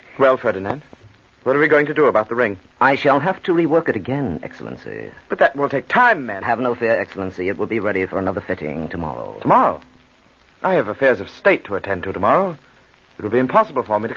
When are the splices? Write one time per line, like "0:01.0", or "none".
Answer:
0:06.4